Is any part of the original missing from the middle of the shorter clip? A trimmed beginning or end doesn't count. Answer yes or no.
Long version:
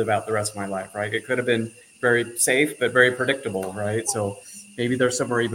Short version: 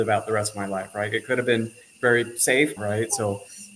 yes